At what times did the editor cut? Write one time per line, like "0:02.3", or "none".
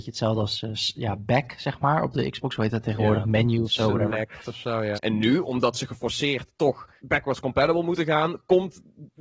0:05.0
0:07.0